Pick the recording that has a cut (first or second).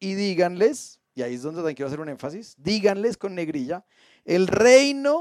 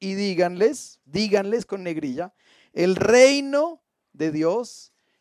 second